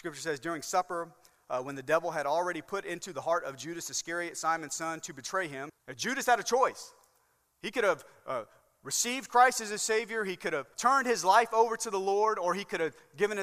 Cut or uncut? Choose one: cut